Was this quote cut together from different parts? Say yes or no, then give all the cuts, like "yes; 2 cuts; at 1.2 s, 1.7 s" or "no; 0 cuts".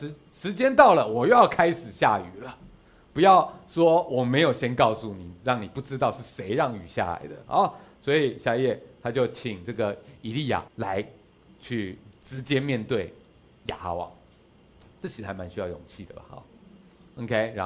yes; 1 cut; at 10.7 s